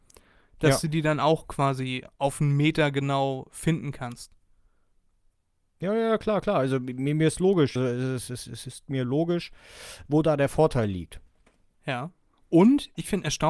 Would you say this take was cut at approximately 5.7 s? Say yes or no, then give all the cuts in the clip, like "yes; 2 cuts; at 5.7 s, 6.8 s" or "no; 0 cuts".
no; 2 cuts; at 7.8 s, 11.8 s